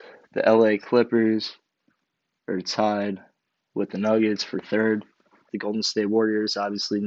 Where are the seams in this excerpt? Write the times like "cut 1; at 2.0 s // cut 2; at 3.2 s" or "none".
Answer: cut 1; at 5.5 s